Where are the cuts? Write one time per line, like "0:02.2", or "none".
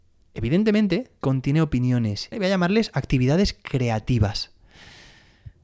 0:01.2
0:02.3